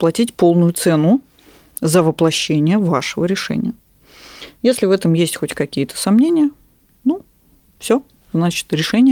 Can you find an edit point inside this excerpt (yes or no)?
no